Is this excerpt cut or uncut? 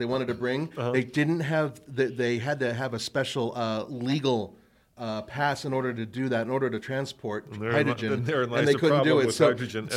uncut